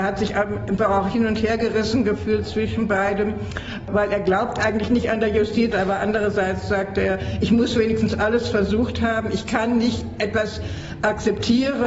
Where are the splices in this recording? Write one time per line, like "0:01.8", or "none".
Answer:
0:05.7